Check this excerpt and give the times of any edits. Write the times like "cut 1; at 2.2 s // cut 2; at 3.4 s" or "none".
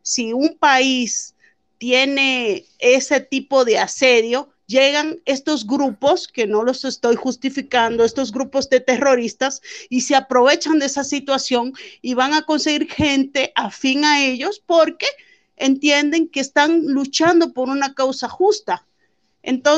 none